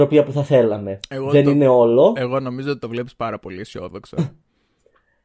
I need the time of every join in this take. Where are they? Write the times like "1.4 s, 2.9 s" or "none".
none

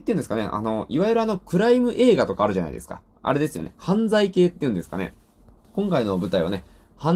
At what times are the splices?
none

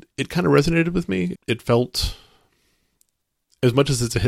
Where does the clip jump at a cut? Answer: 1.3 s

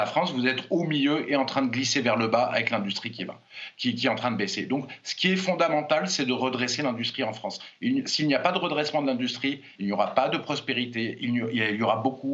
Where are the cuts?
9.8 s

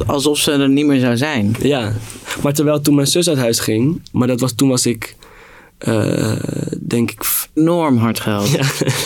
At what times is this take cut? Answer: 4.1 s, 7.6 s

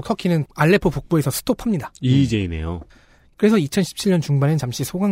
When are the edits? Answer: 3.3 s

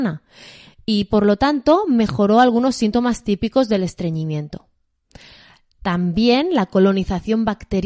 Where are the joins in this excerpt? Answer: none

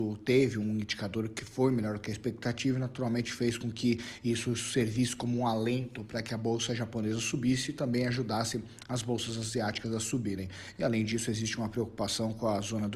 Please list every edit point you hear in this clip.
10.7 s

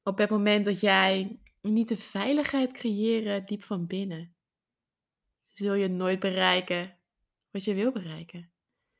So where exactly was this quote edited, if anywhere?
none

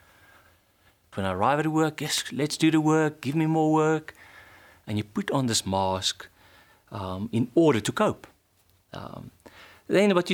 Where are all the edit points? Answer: 1.1 s

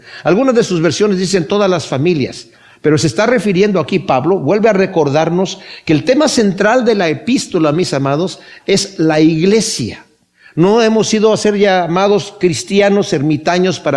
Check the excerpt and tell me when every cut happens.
none

